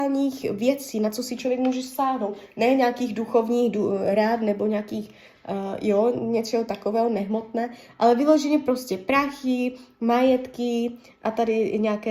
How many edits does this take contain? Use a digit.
0